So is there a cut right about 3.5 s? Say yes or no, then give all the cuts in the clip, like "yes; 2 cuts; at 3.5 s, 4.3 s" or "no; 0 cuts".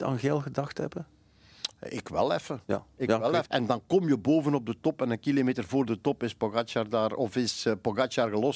yes; 1 cut; at 3.5 s